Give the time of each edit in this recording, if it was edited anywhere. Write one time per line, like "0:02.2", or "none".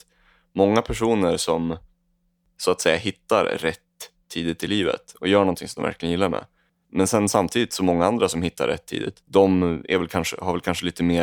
0:06.8
0:09.2